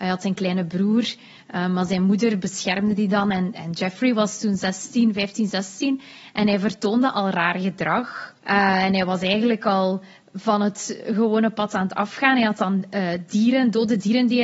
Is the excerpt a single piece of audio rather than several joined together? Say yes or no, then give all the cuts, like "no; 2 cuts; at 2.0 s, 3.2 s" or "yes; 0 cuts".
no; 1 cut; at 8.4 s